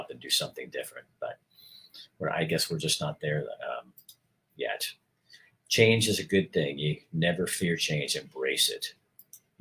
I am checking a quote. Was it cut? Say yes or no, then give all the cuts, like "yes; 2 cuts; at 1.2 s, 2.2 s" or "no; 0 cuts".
no; 0 cuts